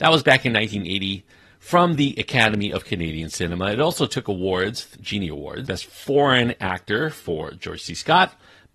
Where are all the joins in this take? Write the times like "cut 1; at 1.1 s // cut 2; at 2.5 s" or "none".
cut 1; at 5.7 s